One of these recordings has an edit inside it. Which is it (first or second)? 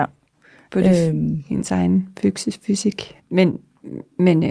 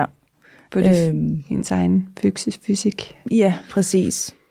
first